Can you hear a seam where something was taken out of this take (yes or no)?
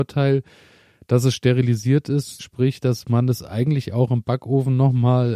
yes